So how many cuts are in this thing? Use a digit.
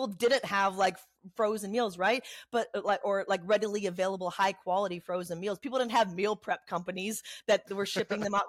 1